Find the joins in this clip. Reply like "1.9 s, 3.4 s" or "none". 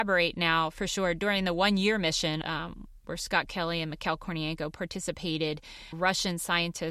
2.4 s, 5.9 s